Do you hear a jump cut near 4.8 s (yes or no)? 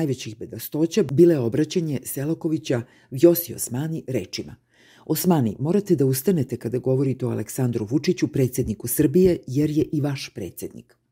no